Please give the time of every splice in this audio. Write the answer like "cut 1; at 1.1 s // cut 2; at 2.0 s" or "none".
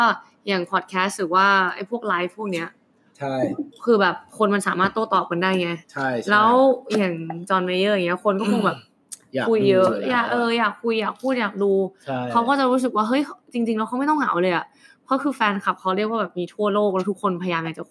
cut 1; at 5.8 s